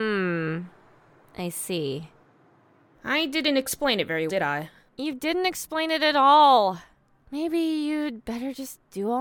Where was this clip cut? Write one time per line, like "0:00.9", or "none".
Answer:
0:04.3